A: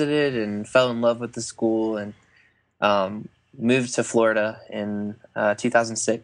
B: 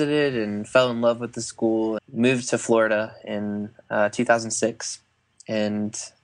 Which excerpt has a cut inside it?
B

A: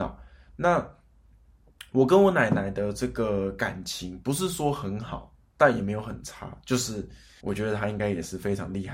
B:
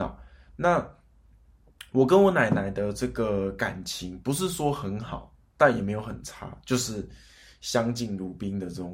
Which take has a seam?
A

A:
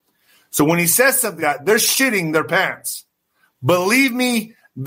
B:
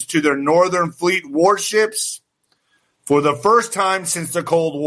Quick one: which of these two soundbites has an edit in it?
A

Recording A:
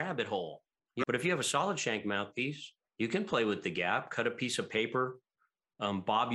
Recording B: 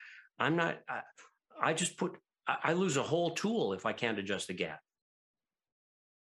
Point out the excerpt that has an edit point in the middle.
A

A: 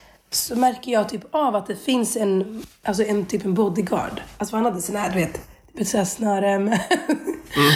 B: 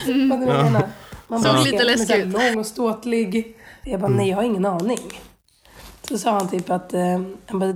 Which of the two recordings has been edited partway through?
B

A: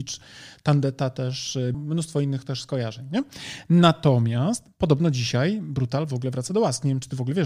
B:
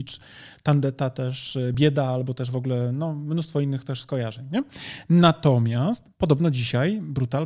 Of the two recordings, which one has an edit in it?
A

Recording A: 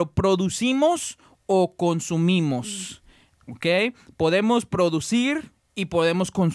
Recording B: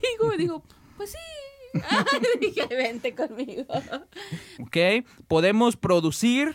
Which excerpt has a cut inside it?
B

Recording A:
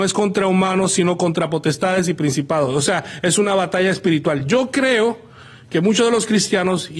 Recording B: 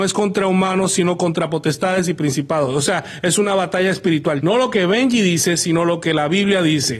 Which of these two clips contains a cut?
B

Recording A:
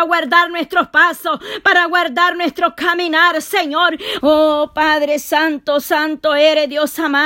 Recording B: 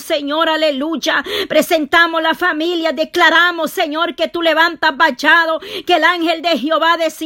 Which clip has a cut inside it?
A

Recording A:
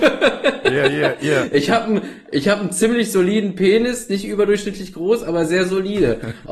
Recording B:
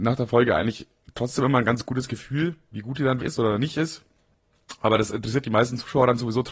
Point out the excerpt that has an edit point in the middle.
B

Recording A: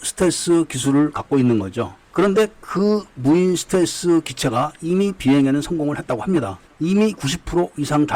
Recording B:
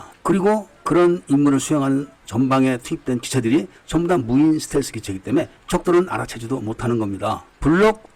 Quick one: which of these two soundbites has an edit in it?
A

